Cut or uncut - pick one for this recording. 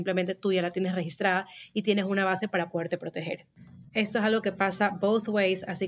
uncut